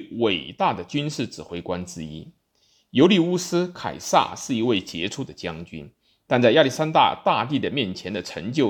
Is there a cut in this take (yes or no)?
no